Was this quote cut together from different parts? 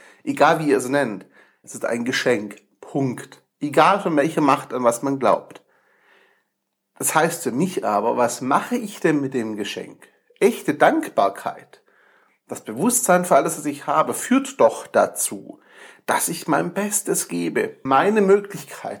yes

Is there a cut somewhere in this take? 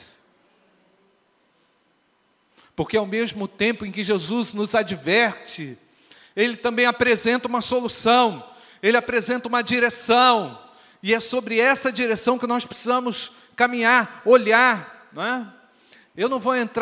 no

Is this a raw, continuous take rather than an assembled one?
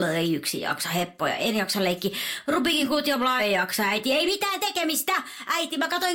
no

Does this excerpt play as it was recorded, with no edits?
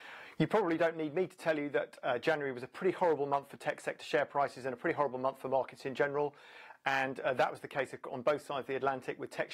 yes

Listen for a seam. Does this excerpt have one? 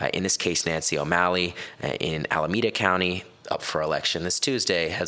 yes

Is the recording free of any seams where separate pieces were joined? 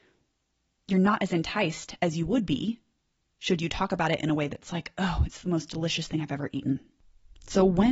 yes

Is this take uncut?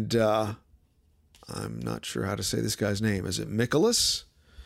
yes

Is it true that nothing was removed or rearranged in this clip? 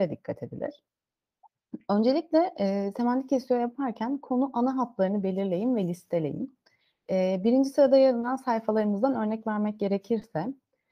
yes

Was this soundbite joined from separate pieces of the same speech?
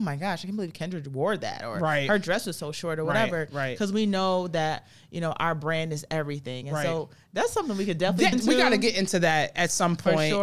yes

